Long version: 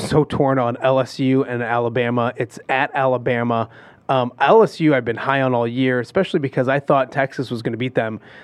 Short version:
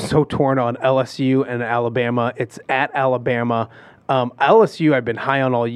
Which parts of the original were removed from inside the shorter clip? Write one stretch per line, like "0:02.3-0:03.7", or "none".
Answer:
none

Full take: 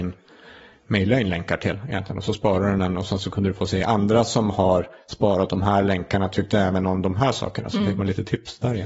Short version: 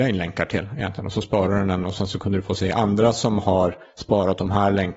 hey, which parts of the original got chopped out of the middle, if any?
none

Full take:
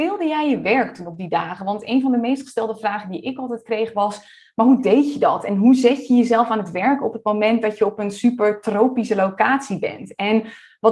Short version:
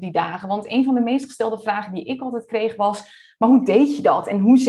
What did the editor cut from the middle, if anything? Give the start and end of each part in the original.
none

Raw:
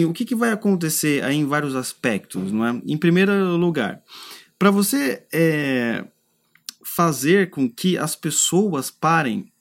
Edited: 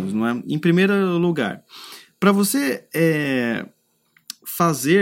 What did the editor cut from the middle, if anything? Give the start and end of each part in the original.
none

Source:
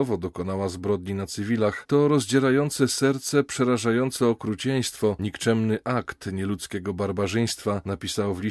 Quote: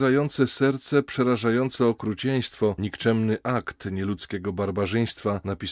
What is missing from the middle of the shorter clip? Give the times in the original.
none

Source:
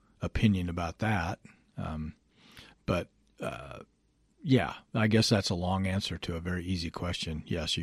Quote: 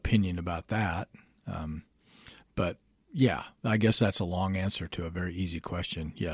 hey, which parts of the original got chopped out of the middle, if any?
0:03.3-0:04.2

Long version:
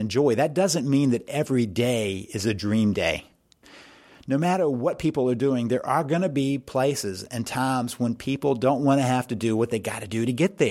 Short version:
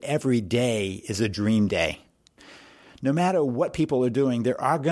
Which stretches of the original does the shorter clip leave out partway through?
none

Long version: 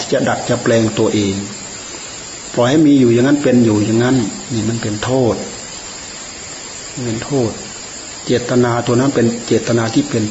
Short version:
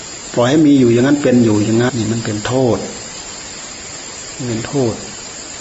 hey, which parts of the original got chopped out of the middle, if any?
0:04.1-0:04.5

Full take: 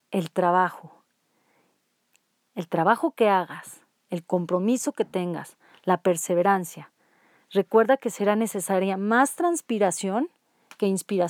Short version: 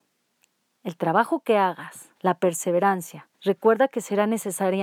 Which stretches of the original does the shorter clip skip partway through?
0:03.9-0:05.8
0:07.0-0:07.4

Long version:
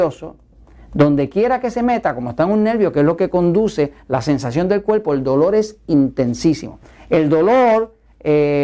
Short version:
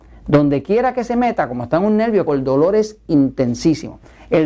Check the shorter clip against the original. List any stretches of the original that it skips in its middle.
0:02.9-0:05.1

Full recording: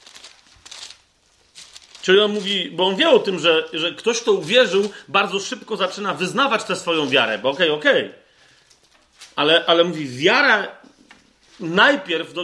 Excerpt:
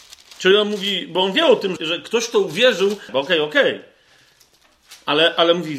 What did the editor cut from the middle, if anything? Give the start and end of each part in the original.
0:03.4-0:03.7
0:05.0-0:07.4

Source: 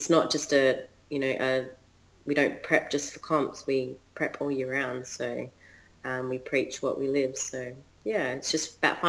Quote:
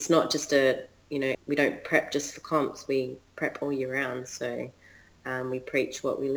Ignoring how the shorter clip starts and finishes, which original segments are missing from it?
0:01.3-0:02.1

